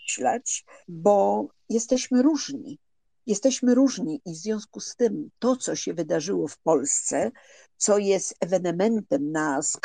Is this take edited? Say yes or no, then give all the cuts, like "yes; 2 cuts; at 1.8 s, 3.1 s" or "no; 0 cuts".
no; 0 cuts